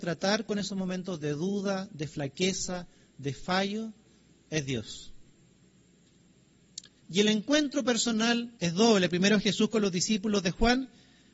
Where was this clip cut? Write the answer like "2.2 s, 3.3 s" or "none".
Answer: 7.0 s, 8.6 s